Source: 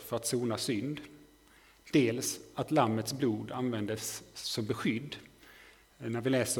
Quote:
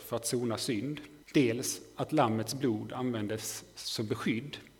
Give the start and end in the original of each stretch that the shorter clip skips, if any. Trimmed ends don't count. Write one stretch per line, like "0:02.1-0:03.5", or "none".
0:01.2-0:01.8